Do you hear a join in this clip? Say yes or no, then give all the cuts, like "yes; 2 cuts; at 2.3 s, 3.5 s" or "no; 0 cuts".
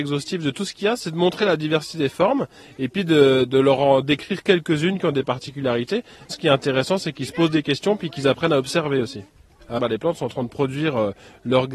yes; 1 cut; at 9.8 s